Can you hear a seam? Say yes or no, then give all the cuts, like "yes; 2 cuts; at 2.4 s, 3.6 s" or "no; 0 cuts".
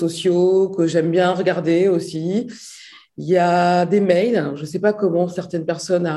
no; 0 cuts